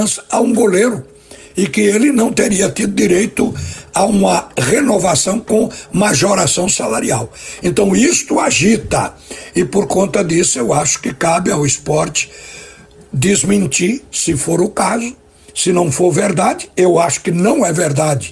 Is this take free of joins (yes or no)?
yes